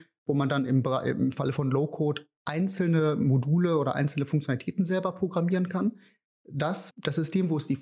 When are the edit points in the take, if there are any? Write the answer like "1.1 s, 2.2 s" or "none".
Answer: 6.9 s